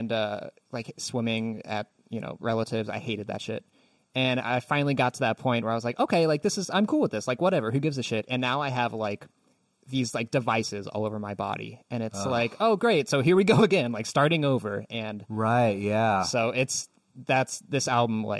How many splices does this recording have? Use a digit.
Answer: 0